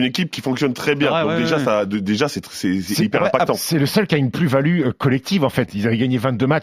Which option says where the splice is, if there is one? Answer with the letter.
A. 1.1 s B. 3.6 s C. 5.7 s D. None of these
D